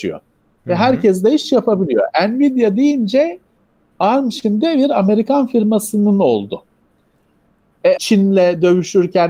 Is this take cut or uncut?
cut